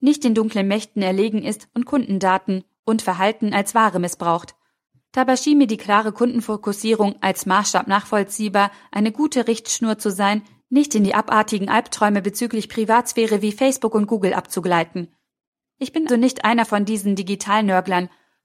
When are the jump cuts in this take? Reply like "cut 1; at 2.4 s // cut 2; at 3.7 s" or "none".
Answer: cut 1; at 16.1 s